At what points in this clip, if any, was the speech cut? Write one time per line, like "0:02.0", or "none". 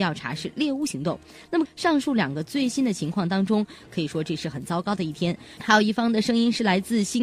0:01.7
0:03.9
0:05.6